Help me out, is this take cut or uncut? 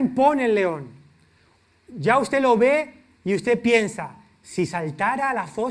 uncut